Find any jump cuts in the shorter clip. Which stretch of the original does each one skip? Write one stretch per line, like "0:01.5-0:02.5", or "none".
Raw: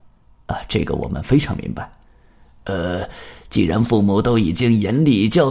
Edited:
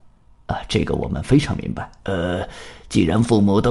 0:02.0-0:02.6